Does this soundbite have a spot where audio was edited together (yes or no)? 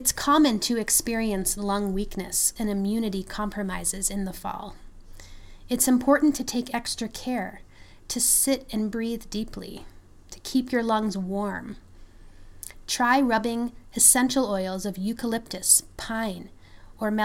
yes